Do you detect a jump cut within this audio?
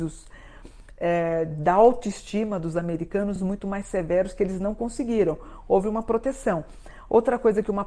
no; 0 cuts

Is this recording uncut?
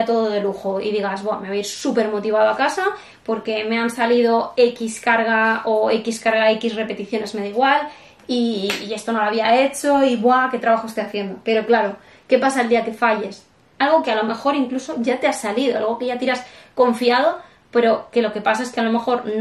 no; 1 cut; at 13.8 s

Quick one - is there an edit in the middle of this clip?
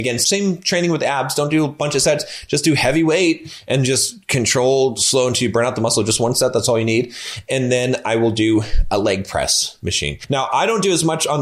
no; 0 cuts

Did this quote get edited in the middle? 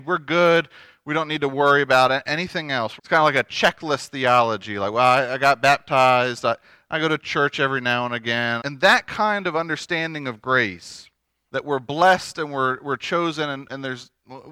yes; 3 cuts; at 3.0 s, 8.6 s, 11.5 s

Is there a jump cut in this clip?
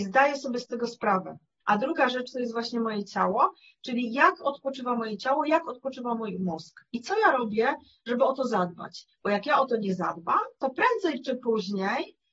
yes; 1 cut; at 1.6 s

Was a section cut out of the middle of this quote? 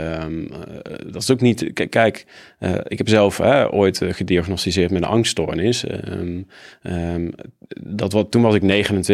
no; 0 cuts

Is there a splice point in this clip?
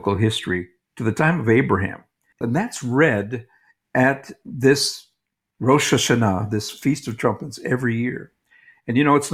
yes; 1 cut; at 2.4 s

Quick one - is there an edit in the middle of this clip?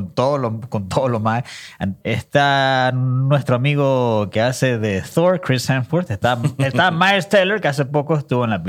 yes; 1 cut; at 2.0 s

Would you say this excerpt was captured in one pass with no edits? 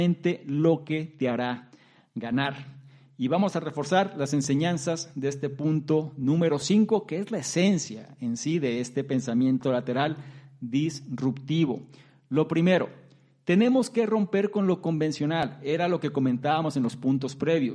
yes; 0 cuts

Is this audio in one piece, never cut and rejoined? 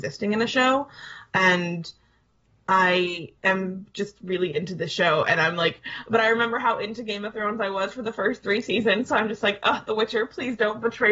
no; 1 cut; at 3.4 s

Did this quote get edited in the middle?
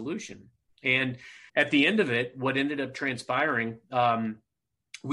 yes; 1 cut; at 1.5 s

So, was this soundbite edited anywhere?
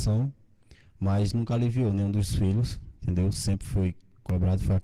no; 0 cuts

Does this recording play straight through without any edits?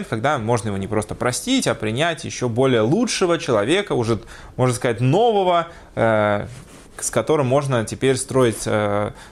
yes; 0 cuts

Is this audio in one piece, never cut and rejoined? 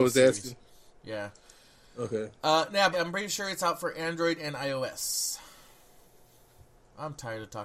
no; 1 cut; at 2.9 s

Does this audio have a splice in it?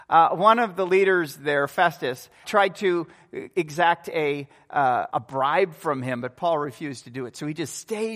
yes; 2 cuts; at 2.4 s, 5.1 s

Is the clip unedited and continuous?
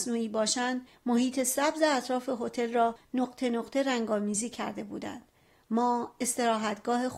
yes; 0 cuts

